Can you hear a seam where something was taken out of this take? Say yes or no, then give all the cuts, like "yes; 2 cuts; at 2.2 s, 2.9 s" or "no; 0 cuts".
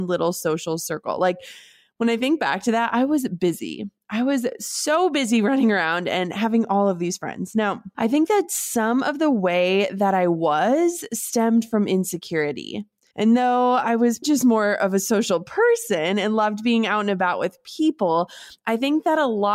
yes; 3 cuts; at 7.9 s, 13.1 s, 14.2 s